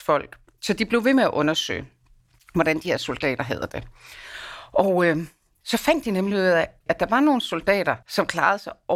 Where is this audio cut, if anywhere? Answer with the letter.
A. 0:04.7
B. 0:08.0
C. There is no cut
B